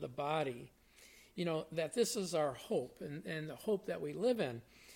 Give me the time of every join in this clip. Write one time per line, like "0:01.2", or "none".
0:03.2